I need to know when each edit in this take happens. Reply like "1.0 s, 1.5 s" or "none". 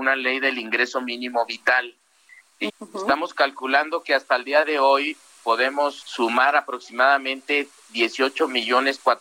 2.7 s, 6.0 s